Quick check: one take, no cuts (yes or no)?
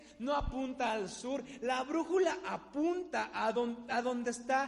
yes